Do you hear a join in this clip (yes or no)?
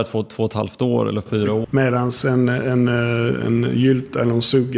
yes